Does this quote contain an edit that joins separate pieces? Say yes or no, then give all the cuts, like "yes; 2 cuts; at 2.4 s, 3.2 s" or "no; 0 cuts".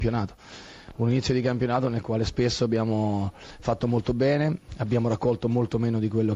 no; 0 cuts